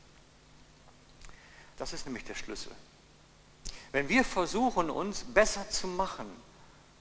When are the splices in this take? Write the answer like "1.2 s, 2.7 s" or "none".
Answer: 1.8 s